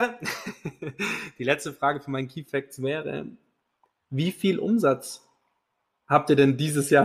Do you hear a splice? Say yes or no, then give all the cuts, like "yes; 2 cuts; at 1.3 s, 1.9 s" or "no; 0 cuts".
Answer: no; 0 cuts